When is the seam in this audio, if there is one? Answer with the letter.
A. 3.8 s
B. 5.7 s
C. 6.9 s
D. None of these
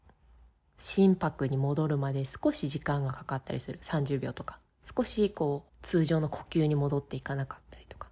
B